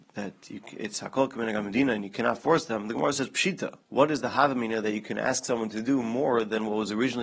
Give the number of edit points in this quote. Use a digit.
1